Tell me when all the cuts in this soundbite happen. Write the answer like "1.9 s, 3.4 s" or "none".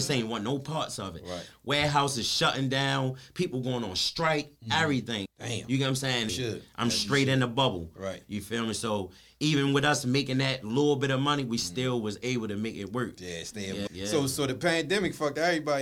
5.3 s, 6.3 s, 13.9 s